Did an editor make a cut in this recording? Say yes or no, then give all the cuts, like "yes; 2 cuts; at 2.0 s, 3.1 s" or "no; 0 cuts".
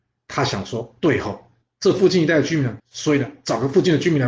yes; 2 cuts; at 1.0 s, 2.8 s